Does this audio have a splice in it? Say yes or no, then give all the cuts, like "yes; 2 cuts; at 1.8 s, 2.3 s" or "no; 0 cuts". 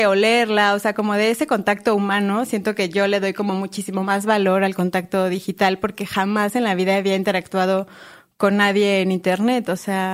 no; 0 cuts